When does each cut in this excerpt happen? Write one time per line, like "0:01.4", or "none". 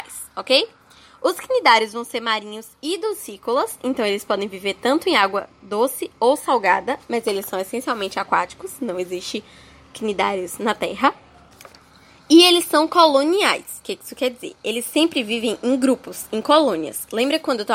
none